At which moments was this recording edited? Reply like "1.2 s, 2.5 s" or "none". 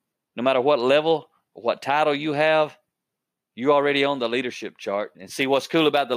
5.1 s